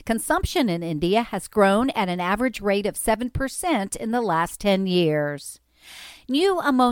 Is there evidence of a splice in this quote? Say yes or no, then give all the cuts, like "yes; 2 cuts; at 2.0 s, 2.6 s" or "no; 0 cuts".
no; 0 cuts